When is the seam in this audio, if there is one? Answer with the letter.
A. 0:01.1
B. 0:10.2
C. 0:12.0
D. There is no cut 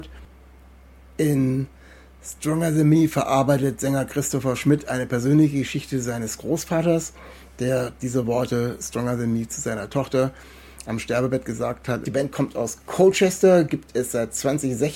C